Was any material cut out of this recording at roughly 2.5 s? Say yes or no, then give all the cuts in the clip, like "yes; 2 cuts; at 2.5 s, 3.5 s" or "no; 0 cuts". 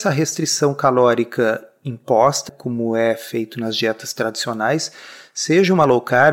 yes; 1 cut; at 2.5 s